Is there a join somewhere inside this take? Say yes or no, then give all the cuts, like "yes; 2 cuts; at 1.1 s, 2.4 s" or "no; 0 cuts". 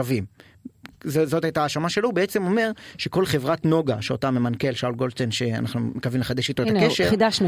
no; 0 cuts